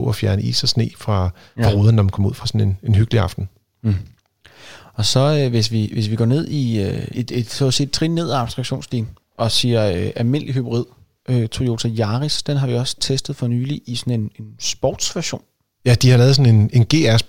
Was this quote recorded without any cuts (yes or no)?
no